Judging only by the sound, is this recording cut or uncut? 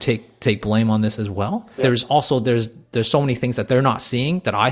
cut